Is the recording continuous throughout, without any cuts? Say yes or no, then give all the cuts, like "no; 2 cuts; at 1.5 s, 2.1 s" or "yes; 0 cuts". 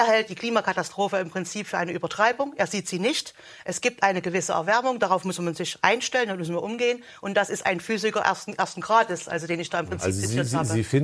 yes; 0 cuts